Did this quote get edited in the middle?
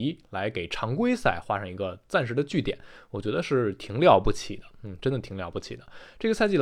no; 0 cuts

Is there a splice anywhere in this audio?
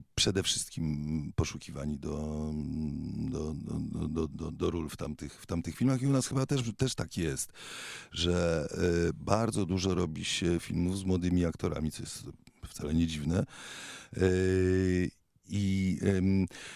yes; 1 cut; at 4.3 s

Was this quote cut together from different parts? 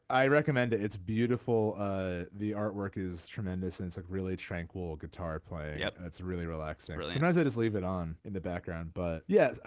no; 0 cuts

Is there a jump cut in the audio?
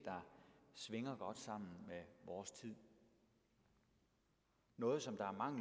yes; 1 cut; at 4.7 s

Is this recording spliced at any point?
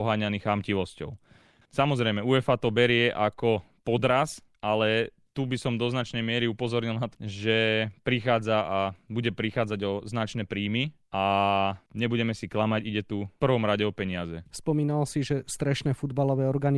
yes; 3 cuts; at 1.6 s, 7.1 s, 14.5 s

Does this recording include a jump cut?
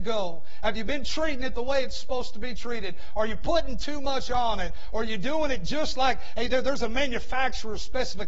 no; 0 cuts

